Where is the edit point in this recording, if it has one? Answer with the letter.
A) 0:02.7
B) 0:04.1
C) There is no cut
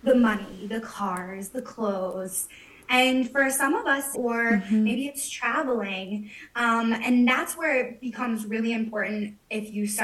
B